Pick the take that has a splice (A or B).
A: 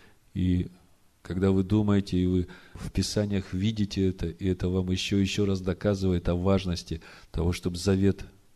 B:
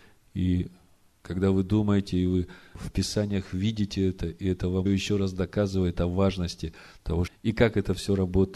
B